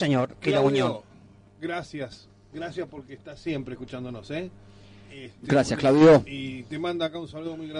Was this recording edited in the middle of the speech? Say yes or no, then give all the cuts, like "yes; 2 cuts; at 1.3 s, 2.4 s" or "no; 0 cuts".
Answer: no; 0 cuts